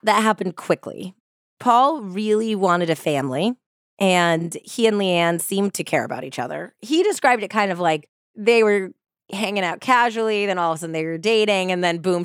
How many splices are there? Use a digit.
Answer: 0